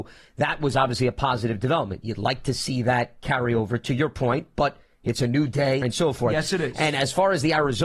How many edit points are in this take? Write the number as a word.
one